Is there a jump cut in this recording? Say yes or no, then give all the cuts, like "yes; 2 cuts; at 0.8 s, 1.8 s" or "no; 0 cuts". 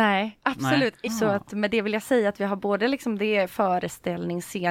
yes; 1 cut; at 1.1 s